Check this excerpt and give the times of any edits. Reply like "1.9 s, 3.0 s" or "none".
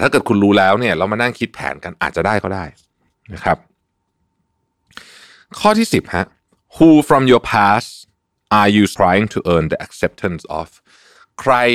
9.0 s